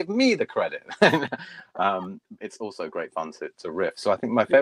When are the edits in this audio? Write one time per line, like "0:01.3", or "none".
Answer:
0:02.4